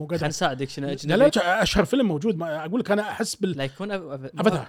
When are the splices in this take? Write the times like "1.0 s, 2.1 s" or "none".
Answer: 1.3 s